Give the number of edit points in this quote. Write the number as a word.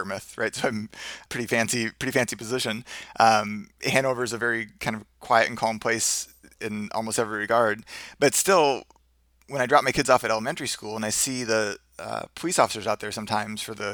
one